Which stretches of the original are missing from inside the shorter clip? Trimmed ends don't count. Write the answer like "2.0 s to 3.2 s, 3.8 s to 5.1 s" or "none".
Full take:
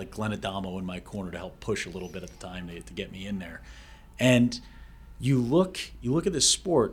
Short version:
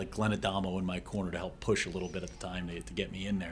none

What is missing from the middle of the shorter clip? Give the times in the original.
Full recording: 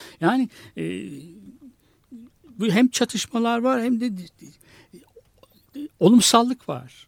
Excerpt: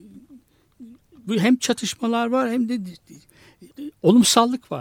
5.0 s to 5.7 s

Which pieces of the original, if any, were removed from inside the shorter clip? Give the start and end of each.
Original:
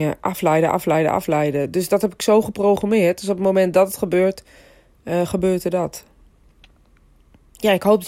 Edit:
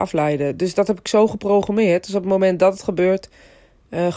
none

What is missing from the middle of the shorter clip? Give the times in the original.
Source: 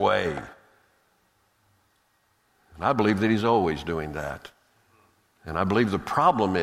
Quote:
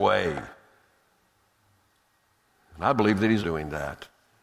3.4 s to 3.8 s

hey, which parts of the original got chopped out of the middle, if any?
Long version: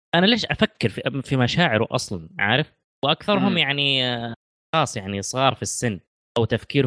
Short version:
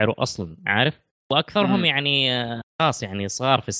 4.4 s to 4.6 s

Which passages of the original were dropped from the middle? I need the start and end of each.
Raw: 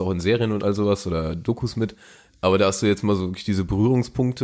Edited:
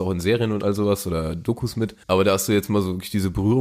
2.0 s to 2.4 s

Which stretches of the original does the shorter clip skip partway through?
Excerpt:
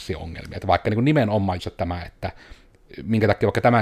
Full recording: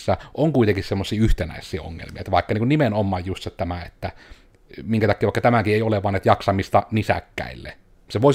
3.2 s to 3.4 s

